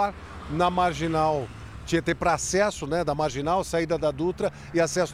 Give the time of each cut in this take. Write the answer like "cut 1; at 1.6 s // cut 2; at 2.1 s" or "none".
none